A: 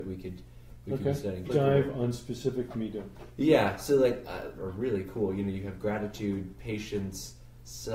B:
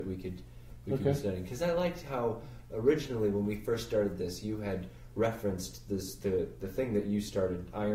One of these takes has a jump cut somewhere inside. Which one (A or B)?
A